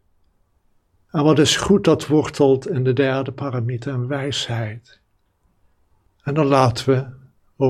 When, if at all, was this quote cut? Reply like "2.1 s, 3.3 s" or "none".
6.1 s